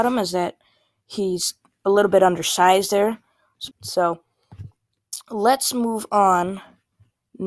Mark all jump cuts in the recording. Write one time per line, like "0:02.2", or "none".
0:03.7